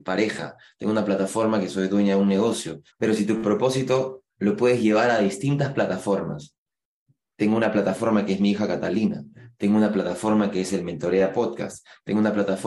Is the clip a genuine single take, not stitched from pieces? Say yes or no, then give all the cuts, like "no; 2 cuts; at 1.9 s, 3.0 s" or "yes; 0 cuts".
no; 1 cut; at 2.9 s